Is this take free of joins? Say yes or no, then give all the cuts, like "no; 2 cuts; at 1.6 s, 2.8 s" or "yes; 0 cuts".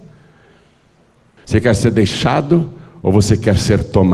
no; 1 cut; at 1.4 s